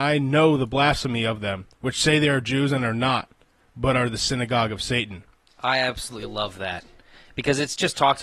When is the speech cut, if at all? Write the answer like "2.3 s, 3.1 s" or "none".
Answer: 1.7 s, 5.5 s